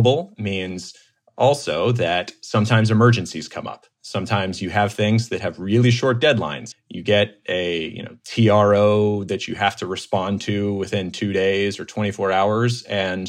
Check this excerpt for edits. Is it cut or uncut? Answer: cut